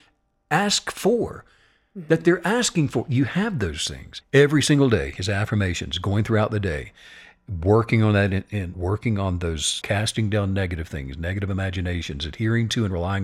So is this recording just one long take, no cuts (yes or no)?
no